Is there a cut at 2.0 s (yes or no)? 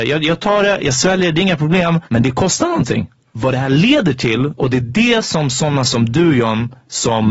yes